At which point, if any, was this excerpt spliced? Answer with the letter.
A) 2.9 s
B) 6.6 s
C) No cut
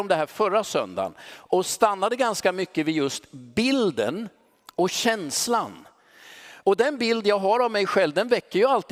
B